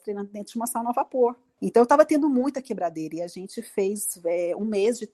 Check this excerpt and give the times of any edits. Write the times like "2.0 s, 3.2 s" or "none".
1.6 s